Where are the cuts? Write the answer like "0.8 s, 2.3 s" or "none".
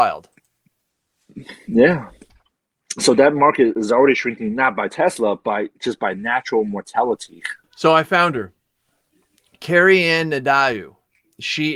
7.6 s